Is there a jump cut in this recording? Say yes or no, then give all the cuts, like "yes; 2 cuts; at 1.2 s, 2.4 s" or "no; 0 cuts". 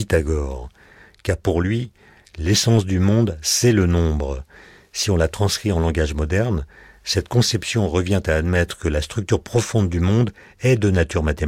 no; 0 cuts